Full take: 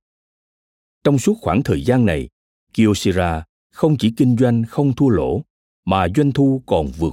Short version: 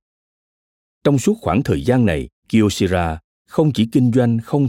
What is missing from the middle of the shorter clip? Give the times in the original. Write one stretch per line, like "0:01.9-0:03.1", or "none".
0:02.4-0:02.6